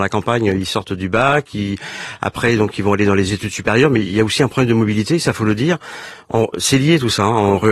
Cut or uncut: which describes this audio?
uncut